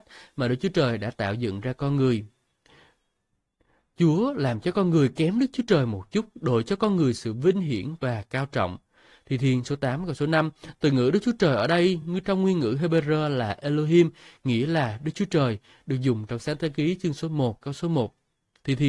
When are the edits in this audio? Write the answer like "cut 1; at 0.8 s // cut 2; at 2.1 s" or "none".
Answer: none